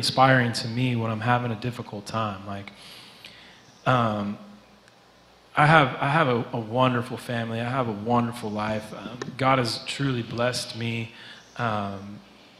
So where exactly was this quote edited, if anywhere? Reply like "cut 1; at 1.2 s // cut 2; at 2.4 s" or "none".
none

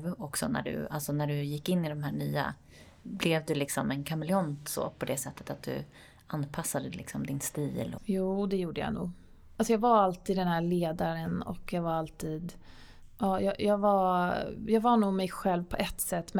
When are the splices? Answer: cut 1; at 8.0 s

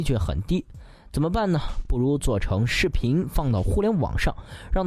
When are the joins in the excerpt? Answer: none

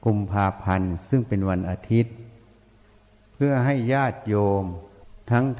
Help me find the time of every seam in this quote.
none

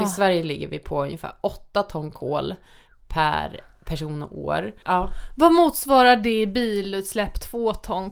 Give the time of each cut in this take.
cut 1; at 4.8 s

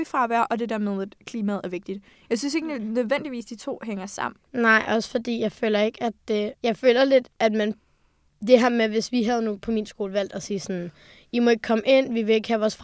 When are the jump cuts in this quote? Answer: cut 1; at 4.4 s // cut 2; at 6.6 s

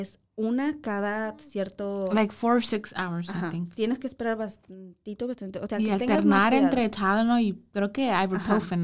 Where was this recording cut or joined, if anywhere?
none

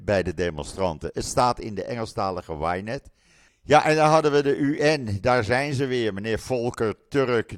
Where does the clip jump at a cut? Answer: cut 1; at 3.5 s

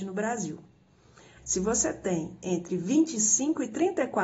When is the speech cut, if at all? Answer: cut 1; at 1.4 s

